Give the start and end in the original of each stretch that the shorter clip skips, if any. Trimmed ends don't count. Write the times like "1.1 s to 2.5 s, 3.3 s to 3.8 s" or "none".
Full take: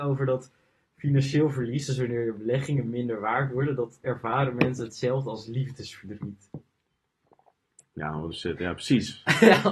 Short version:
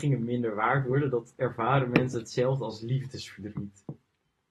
none